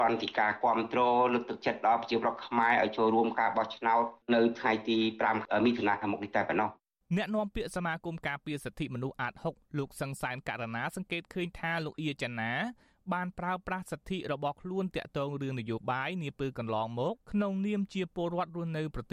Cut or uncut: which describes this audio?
cut